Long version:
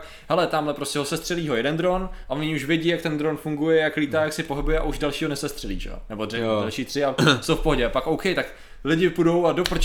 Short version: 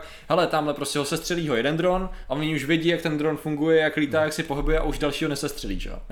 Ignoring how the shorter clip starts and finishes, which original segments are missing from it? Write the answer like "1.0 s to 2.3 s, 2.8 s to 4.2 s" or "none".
none